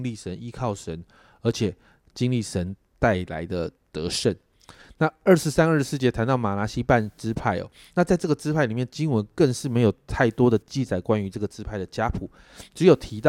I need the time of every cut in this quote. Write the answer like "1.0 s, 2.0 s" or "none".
none